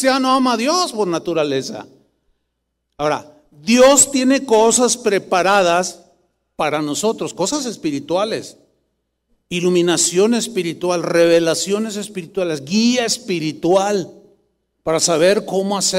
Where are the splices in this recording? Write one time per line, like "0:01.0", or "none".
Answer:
none